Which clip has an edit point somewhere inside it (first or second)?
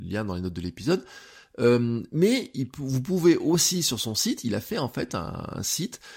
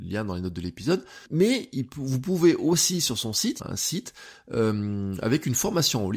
second